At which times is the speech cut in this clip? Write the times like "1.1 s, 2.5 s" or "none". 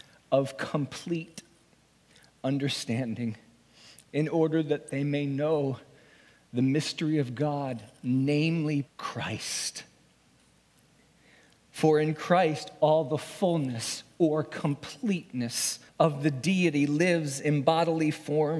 8.9 s, 15.9 s